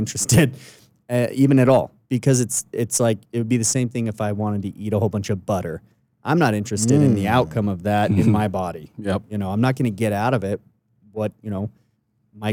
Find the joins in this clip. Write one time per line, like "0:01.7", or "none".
0:11.3

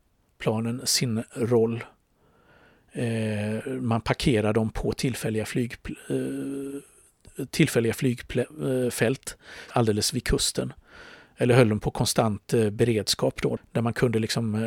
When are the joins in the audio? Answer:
0:09.7
0:13.6

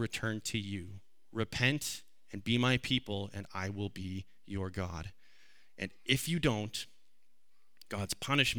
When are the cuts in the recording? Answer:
none

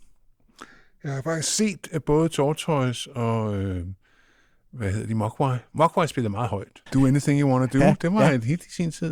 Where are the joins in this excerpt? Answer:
0:06.9

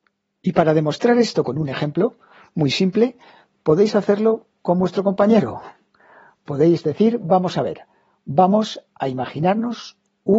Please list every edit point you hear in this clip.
none

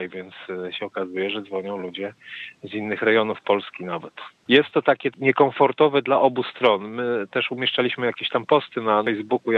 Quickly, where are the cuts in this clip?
0:04.4

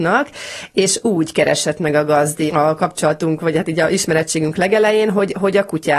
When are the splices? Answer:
0:02.5

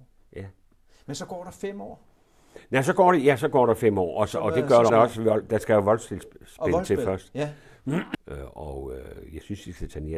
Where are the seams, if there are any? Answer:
0:04.9
0:08.1

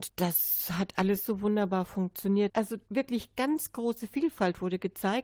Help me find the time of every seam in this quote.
0:02.5

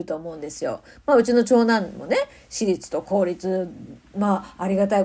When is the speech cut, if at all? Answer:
none

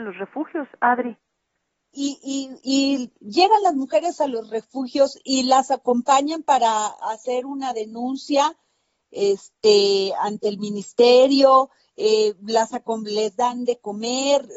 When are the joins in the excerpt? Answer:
0:01.9
0:03.2

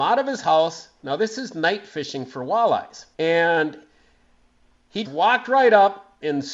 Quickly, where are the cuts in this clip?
0:03.1
0:05.0

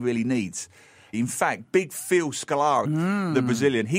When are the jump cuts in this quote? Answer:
0:01.1
0:02.8

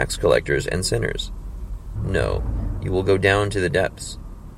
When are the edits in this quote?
0:02.0

